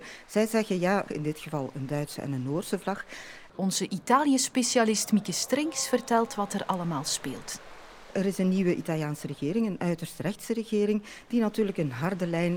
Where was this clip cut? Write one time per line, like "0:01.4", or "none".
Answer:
0:01.1
0:03.5

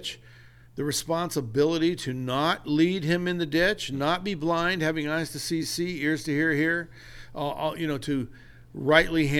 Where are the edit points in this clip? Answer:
none

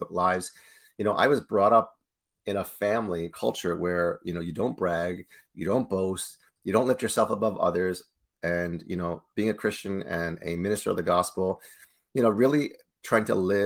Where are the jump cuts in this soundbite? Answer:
0:03.3

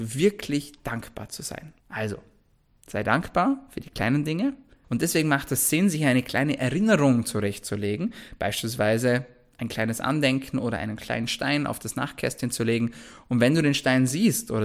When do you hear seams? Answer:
0:01.8
0:04.8

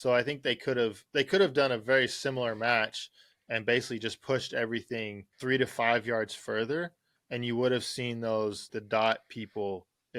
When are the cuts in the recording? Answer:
0:05.3
0:08.7

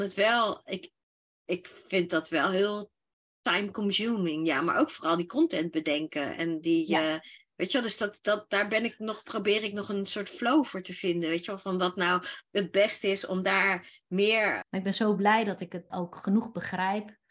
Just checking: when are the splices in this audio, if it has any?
0:14.6
0:15.9

